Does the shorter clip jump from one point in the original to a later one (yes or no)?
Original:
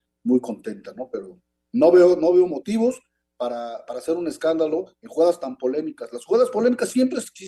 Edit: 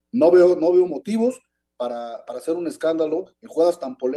no